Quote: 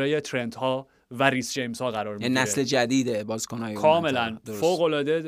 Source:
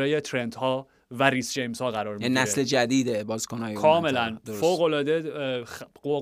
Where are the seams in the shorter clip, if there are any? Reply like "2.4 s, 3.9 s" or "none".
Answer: none